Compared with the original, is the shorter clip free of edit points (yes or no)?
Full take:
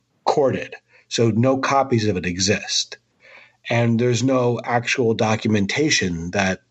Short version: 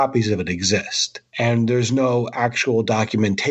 no